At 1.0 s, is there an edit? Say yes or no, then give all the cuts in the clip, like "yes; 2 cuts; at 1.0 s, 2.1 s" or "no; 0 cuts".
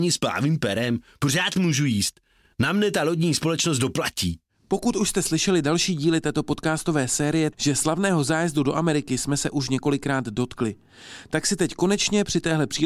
no; 1 cut; at 7.5 s